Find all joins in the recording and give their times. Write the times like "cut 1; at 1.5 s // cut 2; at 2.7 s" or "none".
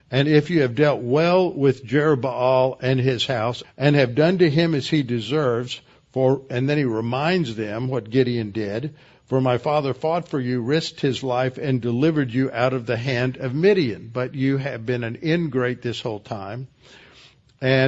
cut 1; at 3.6 s